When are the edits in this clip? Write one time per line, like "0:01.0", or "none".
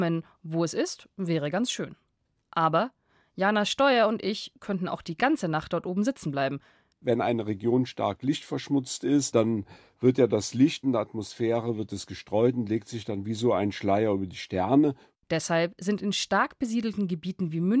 0:02.4
0:06.9
0:15.2